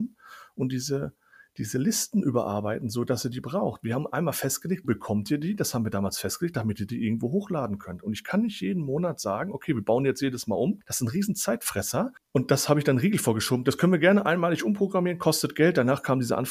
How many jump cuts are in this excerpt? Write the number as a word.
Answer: one